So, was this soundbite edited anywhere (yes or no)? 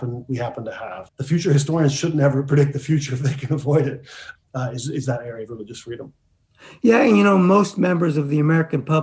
yes